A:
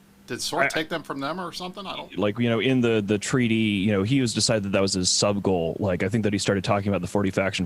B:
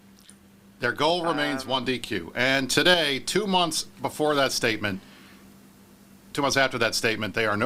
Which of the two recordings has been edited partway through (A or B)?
A